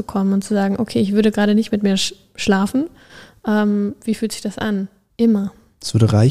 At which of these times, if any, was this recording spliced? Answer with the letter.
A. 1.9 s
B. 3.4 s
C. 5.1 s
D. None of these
C